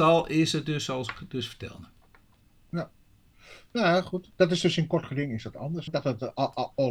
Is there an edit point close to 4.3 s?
no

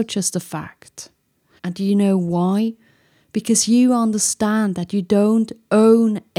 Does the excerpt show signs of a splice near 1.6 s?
yes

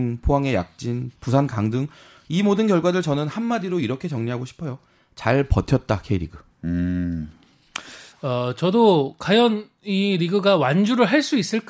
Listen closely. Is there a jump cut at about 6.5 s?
no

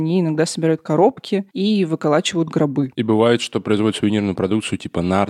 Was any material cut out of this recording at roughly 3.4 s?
no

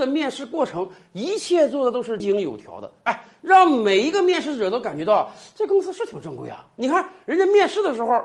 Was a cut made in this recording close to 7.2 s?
no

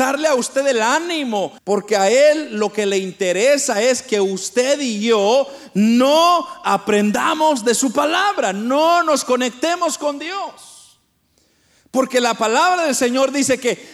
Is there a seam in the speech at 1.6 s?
yes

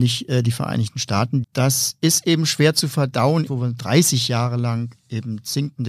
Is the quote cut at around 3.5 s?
yes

